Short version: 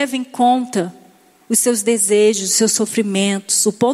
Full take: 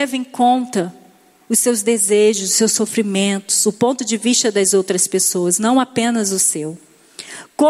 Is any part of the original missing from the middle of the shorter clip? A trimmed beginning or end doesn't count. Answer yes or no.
no